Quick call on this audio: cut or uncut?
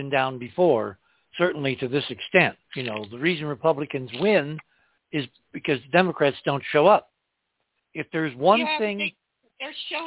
cut